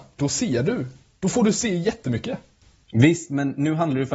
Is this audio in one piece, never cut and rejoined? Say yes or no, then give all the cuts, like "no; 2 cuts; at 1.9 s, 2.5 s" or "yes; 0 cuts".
yes; 0 cuts